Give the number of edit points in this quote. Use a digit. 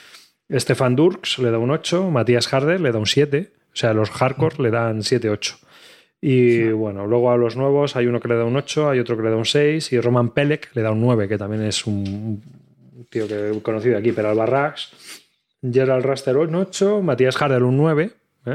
0